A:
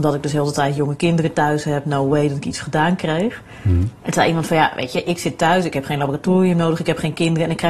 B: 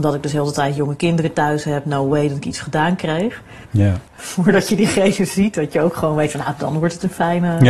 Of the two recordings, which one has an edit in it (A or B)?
B